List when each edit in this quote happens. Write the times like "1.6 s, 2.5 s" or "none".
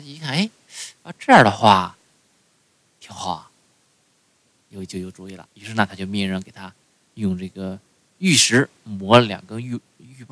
none

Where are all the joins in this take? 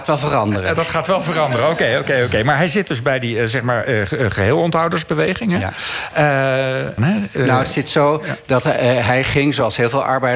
7.0 s

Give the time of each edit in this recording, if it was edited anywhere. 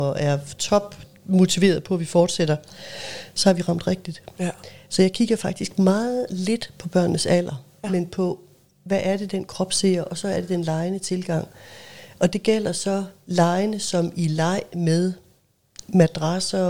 none

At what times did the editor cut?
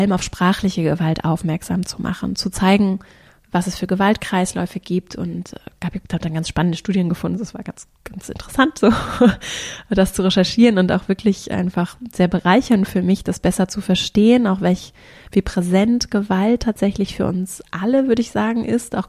none

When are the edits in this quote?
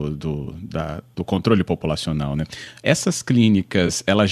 2.8 s

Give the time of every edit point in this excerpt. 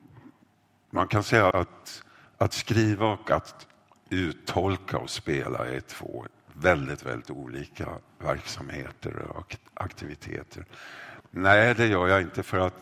1.5 s, 11.2 s

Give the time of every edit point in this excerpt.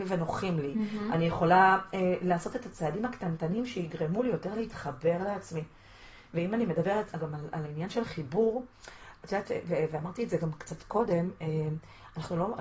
7.1 s

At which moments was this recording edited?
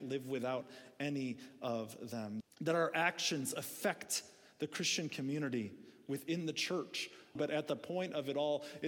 2.4 s, 7.4 s

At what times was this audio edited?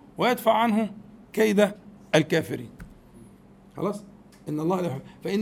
none

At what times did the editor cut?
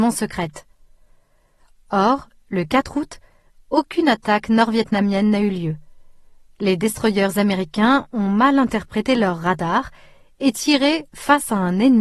none

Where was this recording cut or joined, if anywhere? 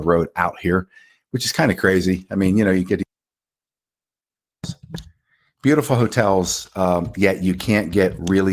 none

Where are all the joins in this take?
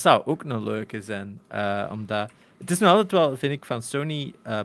none

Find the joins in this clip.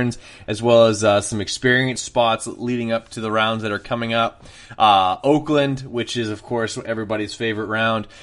none

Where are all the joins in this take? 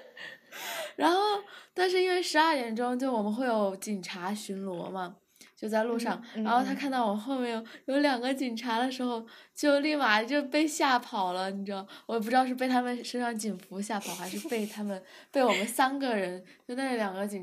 none

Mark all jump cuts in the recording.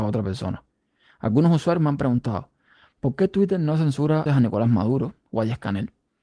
4.3 s

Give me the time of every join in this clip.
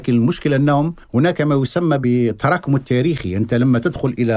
1.0 s

